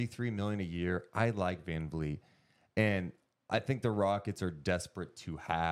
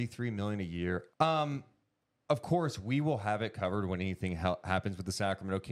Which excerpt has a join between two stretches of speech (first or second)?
second